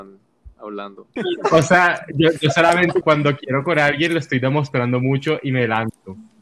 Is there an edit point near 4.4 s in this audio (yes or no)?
no